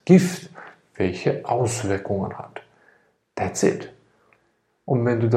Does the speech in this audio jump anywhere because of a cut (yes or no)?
no